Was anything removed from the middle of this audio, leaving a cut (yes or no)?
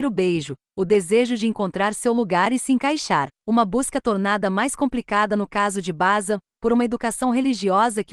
no